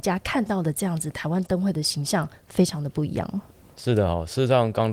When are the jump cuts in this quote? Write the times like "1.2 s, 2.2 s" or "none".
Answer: none